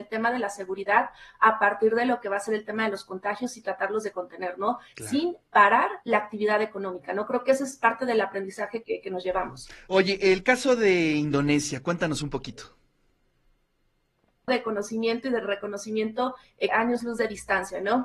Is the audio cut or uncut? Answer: cut